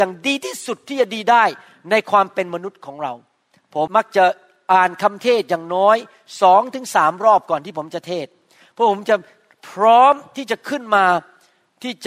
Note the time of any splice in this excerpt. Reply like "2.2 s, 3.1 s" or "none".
3.9 s